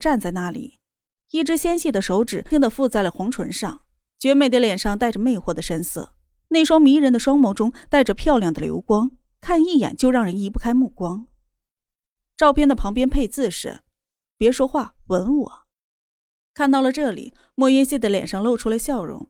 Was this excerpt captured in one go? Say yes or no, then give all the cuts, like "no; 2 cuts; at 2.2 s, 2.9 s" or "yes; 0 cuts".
no; 1 cut; at 2.5 s